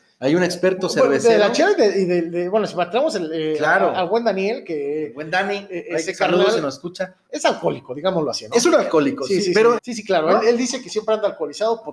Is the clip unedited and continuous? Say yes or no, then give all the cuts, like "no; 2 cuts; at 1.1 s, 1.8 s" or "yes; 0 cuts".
no; 2 cuts; at 7.3 s, 9.8 s